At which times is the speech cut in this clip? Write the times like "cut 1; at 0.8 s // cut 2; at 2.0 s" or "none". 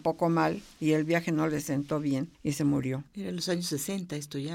cut 1; at 3.1 s